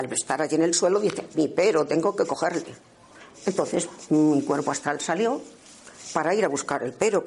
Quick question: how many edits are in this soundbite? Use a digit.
1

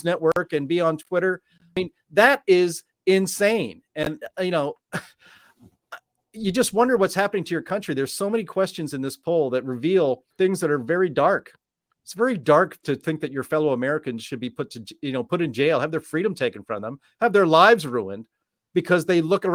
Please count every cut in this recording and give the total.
1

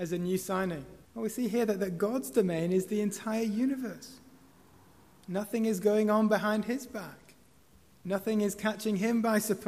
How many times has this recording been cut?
1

